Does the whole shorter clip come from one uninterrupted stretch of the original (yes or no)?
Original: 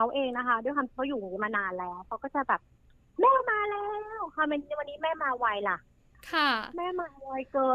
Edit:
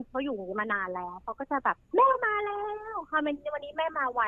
no